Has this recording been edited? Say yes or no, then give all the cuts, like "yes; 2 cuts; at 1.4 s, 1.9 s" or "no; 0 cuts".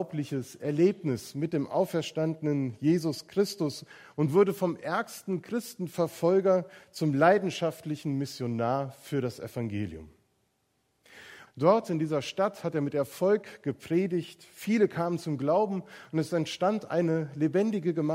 yes; 1 cut; at 11.5 s